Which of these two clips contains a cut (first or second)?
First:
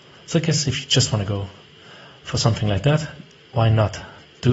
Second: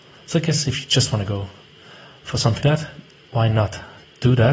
second